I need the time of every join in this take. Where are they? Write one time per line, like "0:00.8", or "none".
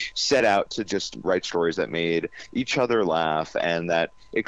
0:01.2

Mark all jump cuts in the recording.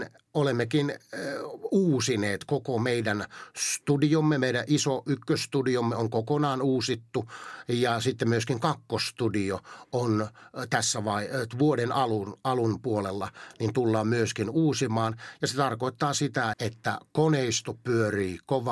0:16.5

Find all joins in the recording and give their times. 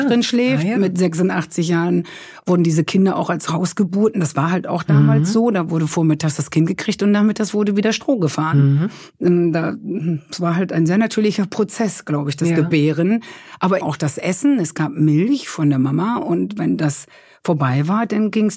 0:13.8

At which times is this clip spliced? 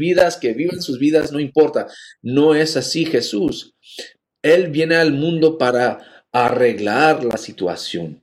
none

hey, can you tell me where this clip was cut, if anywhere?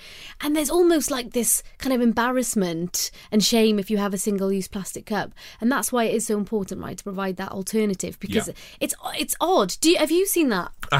none

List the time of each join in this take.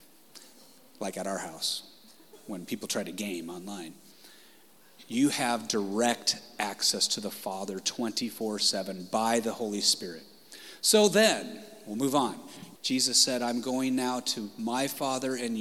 0:12.8

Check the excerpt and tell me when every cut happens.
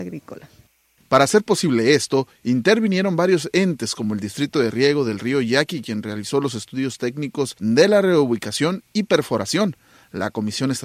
none

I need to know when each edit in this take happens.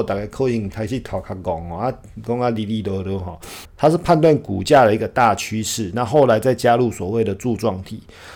0:03.6

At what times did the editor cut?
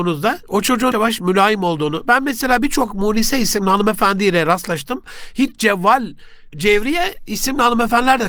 0:00.9

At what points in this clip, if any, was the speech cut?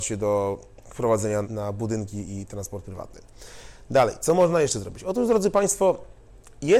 0:01.4

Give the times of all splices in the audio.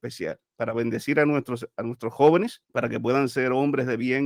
0:02.6

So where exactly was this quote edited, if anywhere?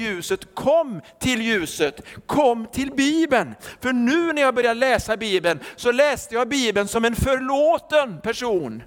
none

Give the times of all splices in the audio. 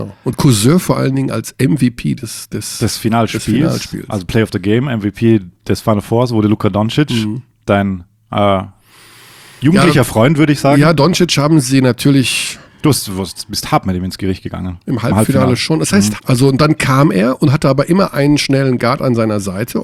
0:16.2

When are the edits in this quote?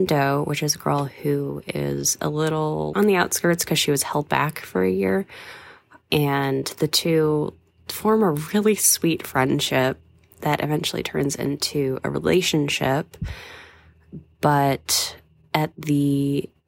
0:02.9

